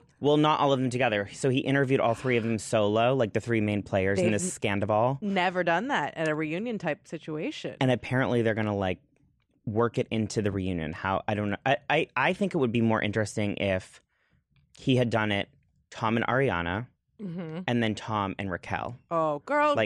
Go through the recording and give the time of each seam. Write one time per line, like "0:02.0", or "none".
none